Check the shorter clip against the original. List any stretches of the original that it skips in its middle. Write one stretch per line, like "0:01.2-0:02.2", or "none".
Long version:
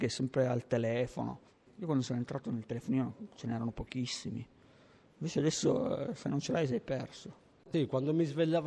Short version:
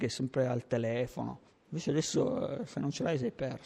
0:01.6-0:05.1